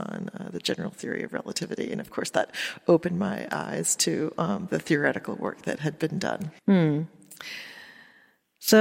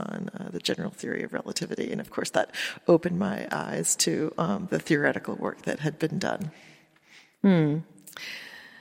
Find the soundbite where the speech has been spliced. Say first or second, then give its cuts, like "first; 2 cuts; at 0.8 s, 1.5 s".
first; 1 cut; at 6.6 s